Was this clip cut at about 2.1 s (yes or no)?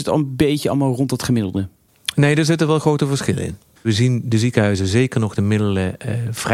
no